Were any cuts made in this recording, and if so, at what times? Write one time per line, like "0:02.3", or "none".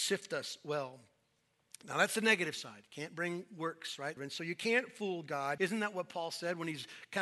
0:04.2
0:05.6